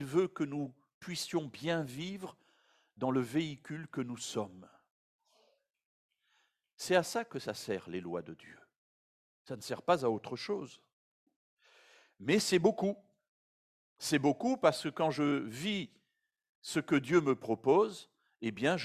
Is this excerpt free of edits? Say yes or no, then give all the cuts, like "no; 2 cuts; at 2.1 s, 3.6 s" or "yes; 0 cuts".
yes; 0 cuts